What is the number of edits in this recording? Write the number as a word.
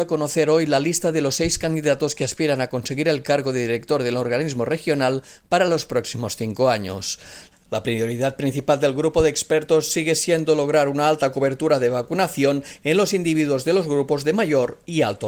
one